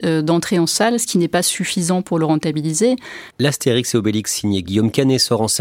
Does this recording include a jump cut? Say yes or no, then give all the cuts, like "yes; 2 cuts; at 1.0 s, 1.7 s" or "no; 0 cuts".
yes; 1 cut; at 3.3 s